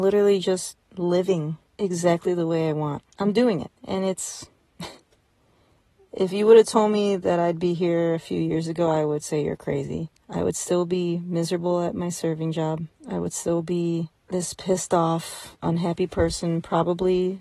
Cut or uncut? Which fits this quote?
uncut